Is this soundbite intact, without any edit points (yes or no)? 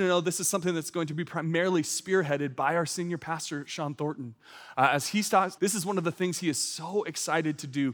no